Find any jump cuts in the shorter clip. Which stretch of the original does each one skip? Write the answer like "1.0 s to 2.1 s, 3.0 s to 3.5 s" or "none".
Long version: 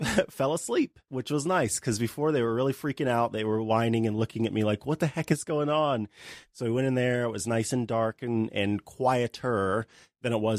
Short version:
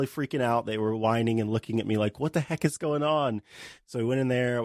none